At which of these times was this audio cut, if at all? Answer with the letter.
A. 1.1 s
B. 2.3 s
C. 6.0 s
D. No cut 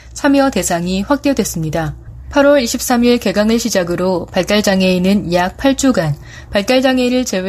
D